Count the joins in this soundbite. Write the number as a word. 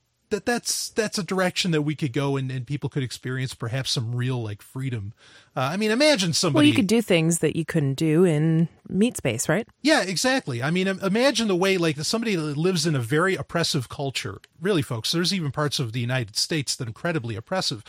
two